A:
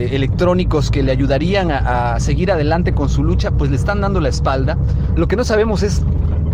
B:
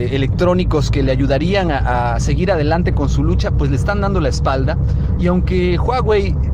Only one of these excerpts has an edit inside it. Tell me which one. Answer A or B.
A